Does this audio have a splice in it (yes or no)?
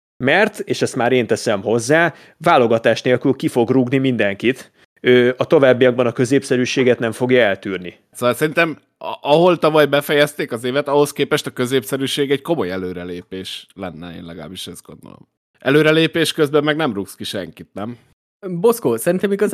yes